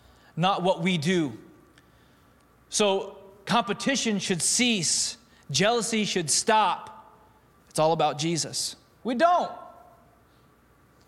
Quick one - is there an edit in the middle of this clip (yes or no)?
yes